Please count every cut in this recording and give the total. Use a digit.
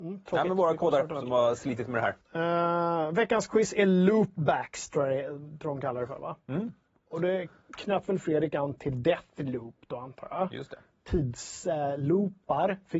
1